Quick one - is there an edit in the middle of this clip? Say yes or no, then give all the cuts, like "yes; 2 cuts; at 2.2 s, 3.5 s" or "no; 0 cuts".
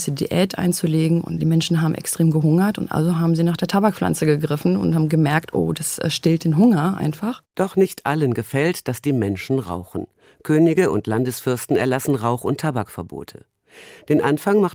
no; 0 cuts